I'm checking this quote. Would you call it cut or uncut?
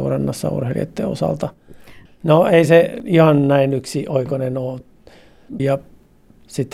cut